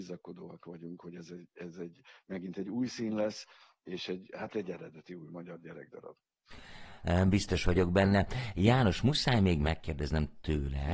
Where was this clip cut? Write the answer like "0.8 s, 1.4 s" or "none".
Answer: none